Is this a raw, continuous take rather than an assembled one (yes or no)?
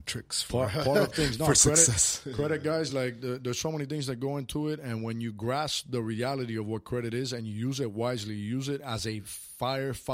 yes